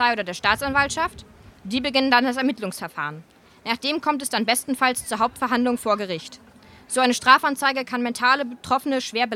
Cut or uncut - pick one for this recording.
uncut